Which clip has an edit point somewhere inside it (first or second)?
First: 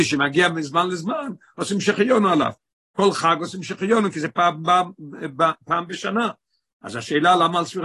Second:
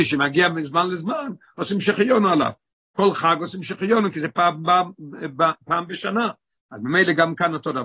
second